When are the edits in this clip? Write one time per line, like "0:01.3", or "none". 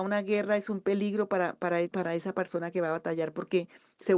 0:01.8